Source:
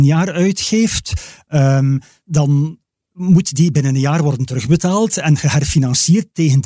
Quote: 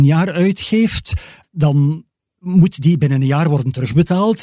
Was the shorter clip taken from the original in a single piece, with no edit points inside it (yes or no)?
no